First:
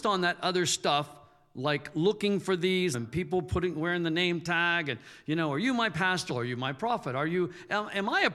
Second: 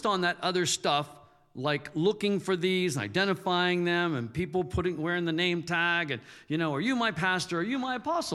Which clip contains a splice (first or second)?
first